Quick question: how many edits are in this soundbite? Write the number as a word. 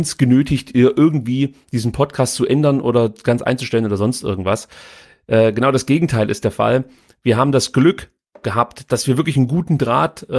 zero